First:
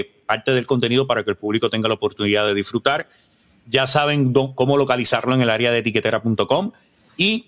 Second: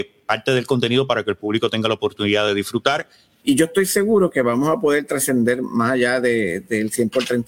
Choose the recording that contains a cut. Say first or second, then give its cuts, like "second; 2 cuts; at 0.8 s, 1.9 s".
second; 1 cut; at 3.4 s